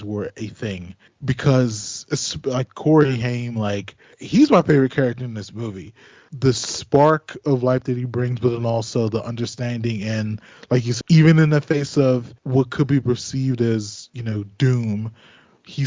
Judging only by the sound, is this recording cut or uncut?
cut